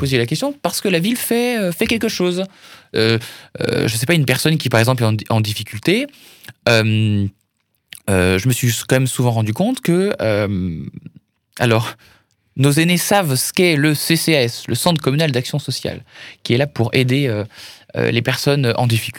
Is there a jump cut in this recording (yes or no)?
no